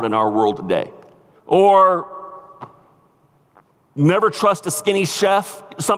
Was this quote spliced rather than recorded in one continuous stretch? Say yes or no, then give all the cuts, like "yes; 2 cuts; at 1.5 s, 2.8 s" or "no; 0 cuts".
yes; 1 cut; at 1.3 s